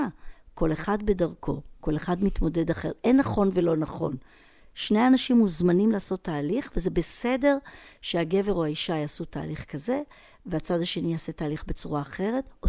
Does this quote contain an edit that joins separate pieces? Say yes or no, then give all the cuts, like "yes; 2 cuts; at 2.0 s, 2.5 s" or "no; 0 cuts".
no; 0 cuts